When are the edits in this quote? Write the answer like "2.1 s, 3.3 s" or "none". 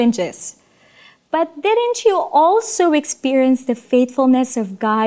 none